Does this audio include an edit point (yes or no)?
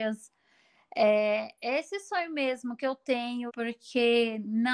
yes